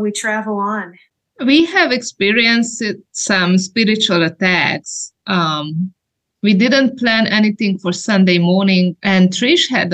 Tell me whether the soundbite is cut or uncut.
cut